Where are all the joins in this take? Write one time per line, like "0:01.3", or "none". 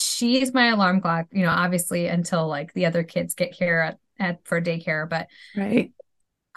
none

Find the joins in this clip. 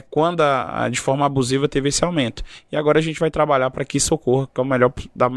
none

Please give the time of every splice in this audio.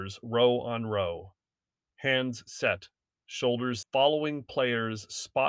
0:03.8

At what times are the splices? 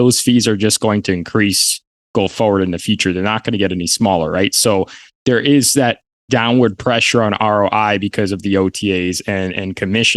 none

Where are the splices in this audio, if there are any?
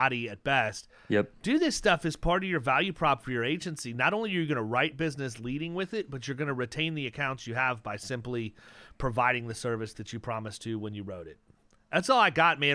none

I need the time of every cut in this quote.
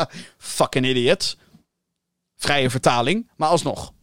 none

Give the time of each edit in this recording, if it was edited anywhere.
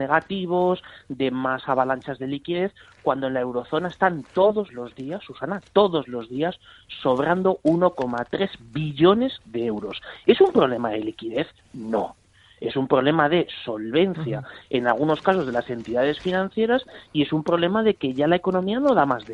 none

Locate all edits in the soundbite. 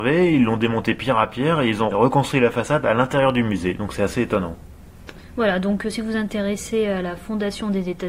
0:01.9

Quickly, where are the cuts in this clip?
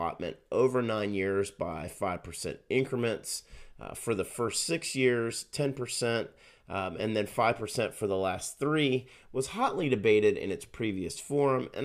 none

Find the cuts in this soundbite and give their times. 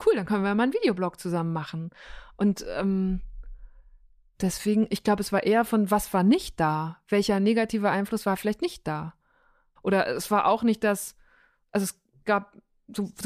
0:09.8

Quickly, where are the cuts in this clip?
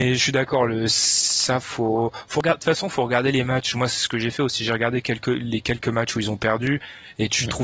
none

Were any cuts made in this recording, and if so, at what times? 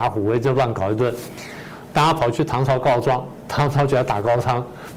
none

